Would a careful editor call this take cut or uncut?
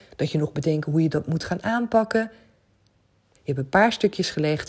cut